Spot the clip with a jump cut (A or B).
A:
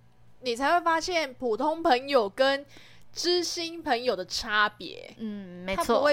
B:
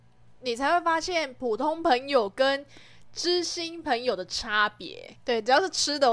B